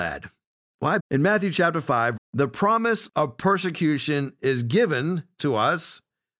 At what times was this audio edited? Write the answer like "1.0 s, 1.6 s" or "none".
1.0 s, 2.2 s